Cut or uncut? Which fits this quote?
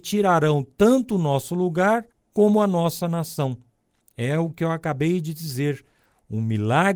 uncut